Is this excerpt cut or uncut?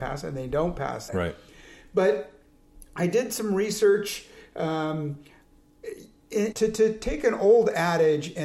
cut